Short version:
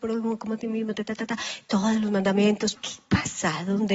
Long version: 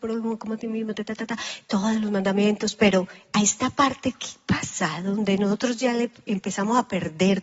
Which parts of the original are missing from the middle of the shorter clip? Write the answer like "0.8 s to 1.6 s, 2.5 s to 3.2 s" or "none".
2.8 s to 4.1 s